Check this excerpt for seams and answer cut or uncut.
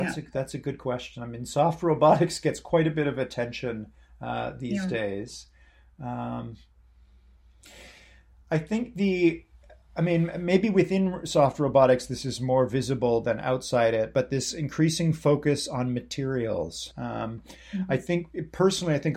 cut